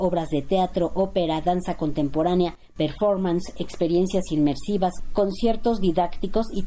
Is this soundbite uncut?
yes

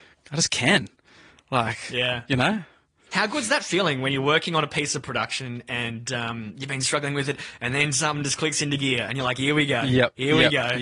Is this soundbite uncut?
yes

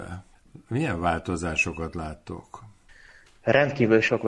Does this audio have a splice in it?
no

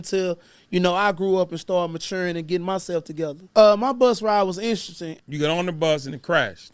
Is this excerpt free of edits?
no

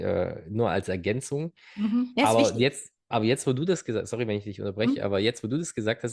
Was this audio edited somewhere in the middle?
no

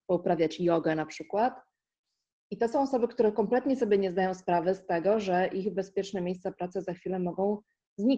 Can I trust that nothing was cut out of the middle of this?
yes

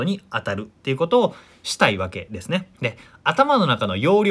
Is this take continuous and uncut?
no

